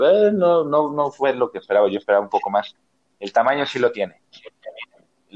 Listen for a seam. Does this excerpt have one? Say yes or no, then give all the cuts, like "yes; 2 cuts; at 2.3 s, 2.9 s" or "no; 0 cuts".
no; 0 cuts